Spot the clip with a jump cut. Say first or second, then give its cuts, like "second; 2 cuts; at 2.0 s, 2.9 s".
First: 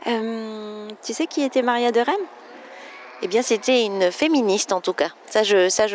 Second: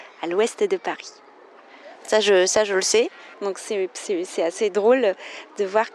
second; 2 cuts; at 2.0 s, 3.3 s